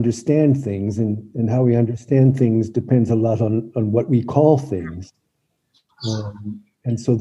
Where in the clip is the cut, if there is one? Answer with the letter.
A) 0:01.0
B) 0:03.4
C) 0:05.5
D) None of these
D